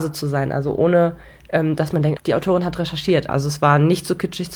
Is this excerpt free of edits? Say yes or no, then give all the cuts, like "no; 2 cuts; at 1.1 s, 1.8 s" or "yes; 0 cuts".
no; 2 cuts; at 2.2 s, 3.3 s